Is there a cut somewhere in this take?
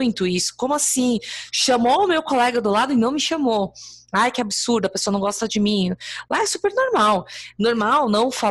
no; 0 cuts

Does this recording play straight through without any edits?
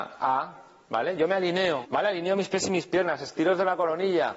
no; 1 cut; at 1.8 s

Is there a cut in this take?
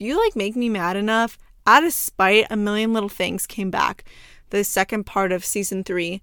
yes; 1 cut; at 2.5 s

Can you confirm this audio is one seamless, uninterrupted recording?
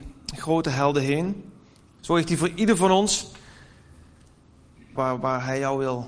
no; 2 cuts; at 2.0 s, 5.0 s

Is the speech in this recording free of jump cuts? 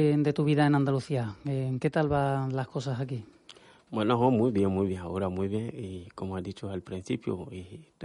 yes; 0 cuts

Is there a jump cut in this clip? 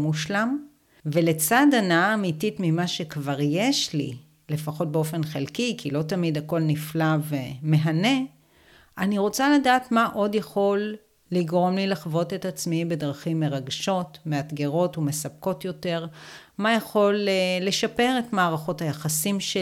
no; 0 cuts

